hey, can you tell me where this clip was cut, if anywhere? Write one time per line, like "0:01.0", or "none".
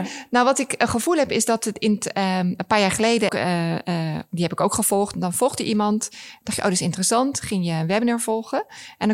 0:03.3
0:05.1